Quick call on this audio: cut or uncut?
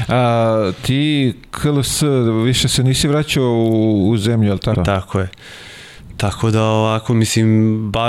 cut